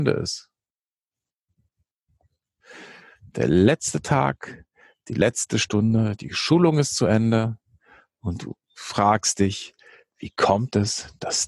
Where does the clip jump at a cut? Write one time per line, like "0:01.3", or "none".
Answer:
none